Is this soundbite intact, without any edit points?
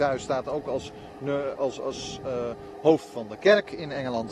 no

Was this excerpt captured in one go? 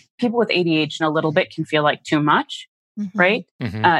no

